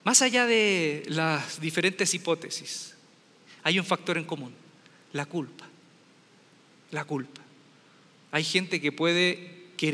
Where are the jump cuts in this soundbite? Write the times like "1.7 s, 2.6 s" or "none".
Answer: none

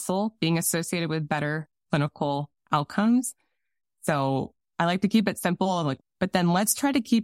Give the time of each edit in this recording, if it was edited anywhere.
2.6 s, 6.0 s

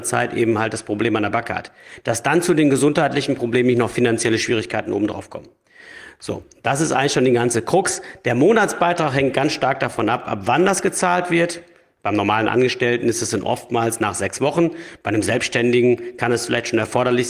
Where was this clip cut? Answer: none

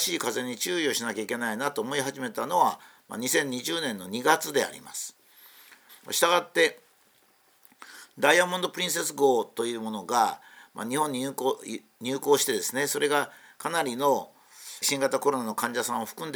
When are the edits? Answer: 5.9 s, 14.8 s

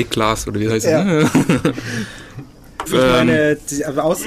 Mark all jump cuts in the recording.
2.9 s

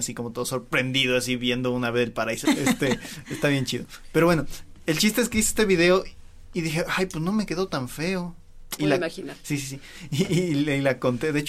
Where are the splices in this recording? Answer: 2.4 s, 8.8 s

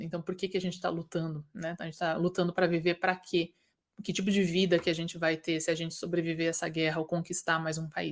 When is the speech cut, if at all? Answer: none

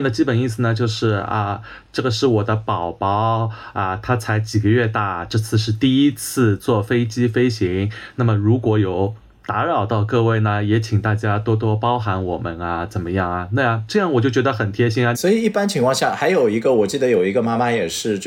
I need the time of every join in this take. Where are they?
15.1 s

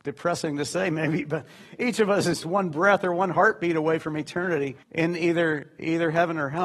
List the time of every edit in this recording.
2.4 s, 4.8 s

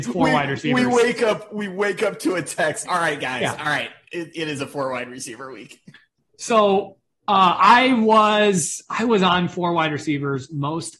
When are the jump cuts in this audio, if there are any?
2.8 s

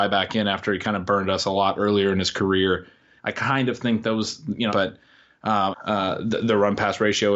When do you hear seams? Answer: 3.2 s, 4.7 s, 5.7 s

